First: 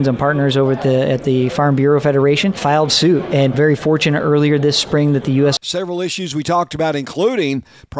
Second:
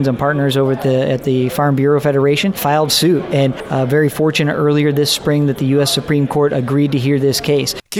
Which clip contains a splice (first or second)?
first